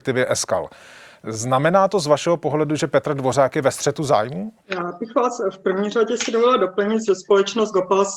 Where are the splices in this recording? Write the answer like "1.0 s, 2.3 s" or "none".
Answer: 4.6 s, 7.1 s